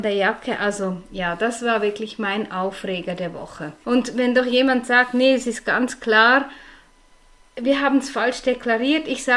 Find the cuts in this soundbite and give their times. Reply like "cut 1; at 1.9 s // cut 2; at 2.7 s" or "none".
cut 1; at 3.8 s